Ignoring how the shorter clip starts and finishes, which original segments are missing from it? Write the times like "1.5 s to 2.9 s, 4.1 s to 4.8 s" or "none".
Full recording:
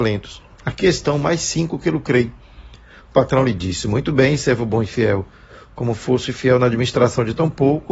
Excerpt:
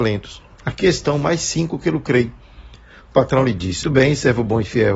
3.8 s to 4.0 s